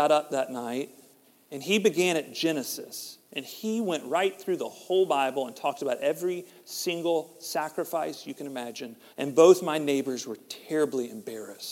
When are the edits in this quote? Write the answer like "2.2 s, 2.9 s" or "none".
9.1 s